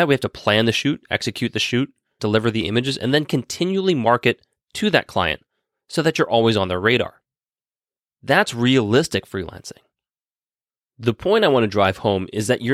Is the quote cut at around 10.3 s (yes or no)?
no